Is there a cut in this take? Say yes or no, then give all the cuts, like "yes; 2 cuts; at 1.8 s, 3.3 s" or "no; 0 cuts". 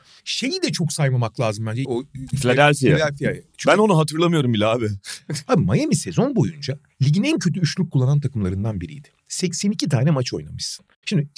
yes; 2 cuts; at 1.8 s, 5.5 s